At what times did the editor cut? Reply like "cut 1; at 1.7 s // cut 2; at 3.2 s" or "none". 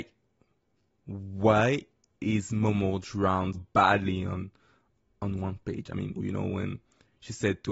cut 1; at 3.5 s // cut 2; at 6.2 s